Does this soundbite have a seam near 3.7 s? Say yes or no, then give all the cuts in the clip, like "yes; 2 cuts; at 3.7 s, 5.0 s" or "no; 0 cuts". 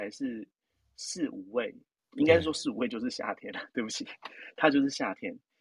no; 1 cut; at 2.0 s